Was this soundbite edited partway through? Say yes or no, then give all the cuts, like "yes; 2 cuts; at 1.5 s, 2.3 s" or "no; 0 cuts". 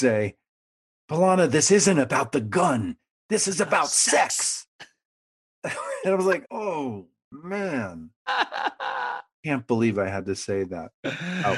yes; 1 cut; at 6.4 s